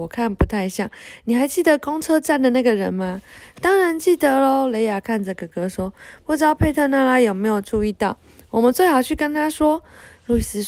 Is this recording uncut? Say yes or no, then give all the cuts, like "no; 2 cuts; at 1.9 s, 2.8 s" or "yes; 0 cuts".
yes; 0 cuts